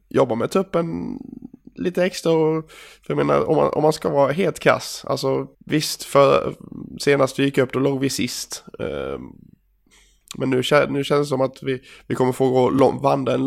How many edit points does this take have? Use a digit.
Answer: 1